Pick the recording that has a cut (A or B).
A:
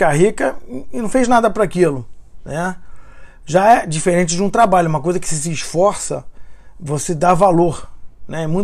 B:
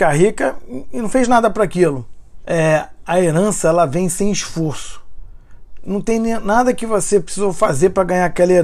B